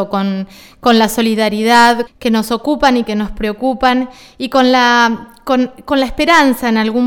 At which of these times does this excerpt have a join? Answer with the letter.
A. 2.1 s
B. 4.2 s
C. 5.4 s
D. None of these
A